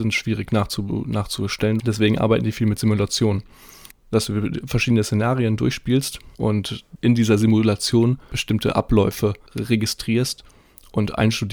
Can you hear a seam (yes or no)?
yes